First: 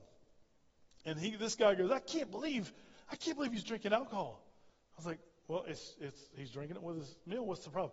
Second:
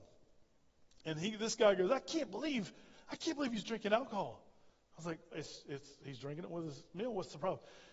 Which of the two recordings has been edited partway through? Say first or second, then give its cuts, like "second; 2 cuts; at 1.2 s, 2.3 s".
second; 1 cut; at 5.3 s